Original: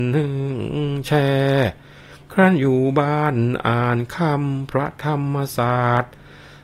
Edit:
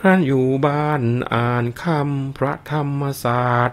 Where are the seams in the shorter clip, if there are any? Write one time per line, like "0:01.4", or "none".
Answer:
none